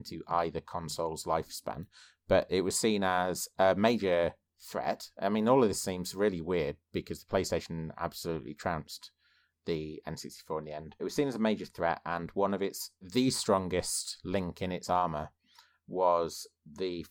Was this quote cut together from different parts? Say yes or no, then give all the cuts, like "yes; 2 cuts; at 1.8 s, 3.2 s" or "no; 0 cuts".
yes; 2 cuts; at 11.0 s, 13.0 s